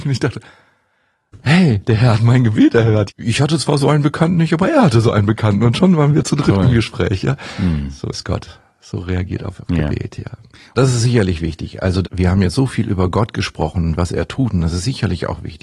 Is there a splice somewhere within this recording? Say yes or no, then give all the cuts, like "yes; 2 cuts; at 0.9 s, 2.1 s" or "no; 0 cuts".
yes; 3 cuts; at 3.1 s, 10.7 s, 12.0 s